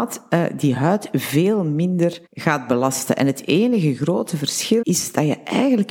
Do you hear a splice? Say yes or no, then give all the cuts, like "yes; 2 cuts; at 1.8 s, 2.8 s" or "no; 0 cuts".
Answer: yes; 2 cuts; at 2.3 s, 4.8 s